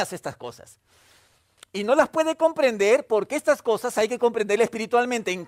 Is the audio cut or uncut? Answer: uncut